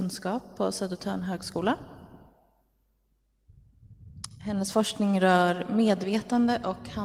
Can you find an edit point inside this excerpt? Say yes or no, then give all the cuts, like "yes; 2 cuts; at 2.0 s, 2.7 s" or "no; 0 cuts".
no; 0 cuts